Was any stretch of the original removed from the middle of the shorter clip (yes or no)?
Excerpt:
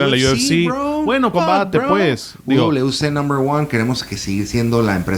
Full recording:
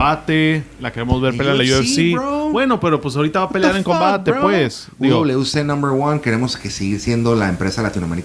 yes